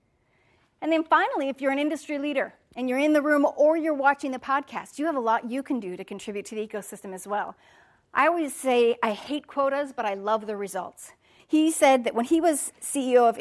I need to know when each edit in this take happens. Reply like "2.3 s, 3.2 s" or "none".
11.4 s

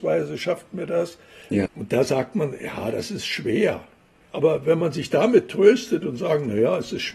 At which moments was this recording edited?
1.7 s, 4.2 s

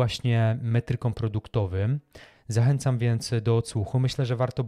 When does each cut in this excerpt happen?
none

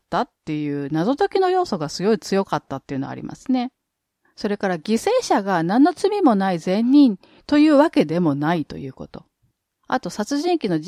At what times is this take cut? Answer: none

